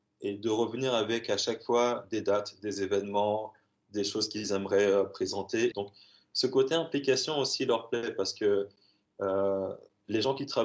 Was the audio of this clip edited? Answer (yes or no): yes